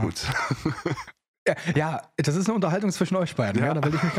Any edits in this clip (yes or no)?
no